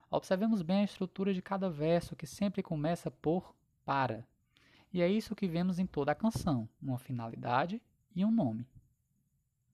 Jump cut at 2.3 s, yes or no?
no